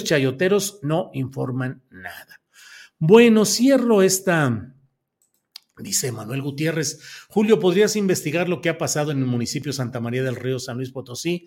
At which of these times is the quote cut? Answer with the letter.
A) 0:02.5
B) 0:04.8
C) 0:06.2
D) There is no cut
D